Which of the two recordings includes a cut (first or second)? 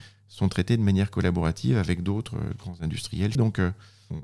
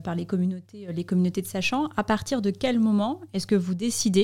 first